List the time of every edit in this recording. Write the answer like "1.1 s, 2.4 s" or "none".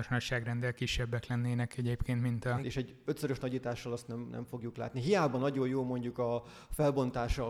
2.6 s